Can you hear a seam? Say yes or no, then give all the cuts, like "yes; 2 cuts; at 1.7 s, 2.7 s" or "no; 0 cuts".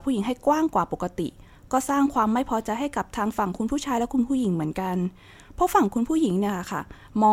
no; 0 cuts